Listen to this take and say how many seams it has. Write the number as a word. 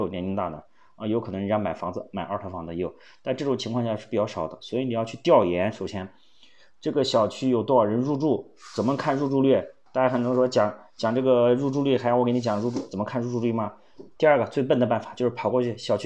one